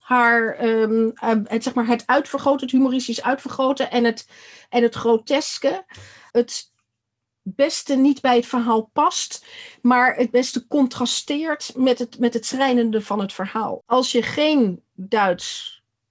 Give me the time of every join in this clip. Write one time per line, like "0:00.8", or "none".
0:06.3
0:13.8